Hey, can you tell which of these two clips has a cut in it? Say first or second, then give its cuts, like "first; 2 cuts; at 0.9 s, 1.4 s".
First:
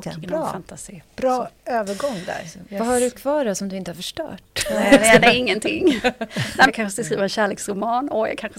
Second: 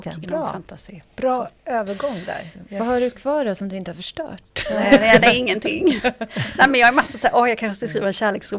first; 1 cut; at 6.7 s